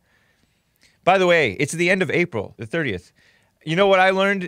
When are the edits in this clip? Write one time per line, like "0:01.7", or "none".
0:02.6